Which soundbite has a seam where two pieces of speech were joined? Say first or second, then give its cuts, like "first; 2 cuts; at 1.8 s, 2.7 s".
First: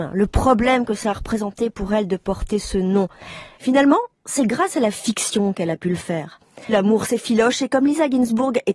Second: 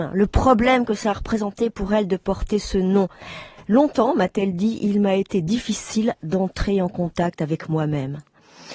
first; 2 cuts; at 3.6 s, 6.7 s